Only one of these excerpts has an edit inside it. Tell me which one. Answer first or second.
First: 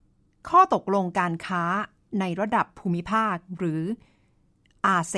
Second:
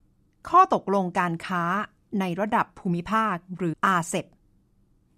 second